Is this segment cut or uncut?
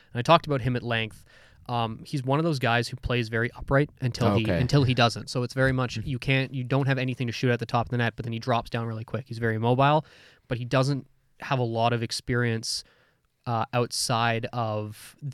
uncut